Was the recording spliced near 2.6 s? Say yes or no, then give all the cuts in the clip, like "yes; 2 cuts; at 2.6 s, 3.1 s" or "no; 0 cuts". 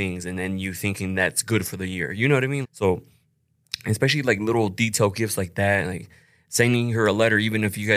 yes; 1 cut; at 2.6 s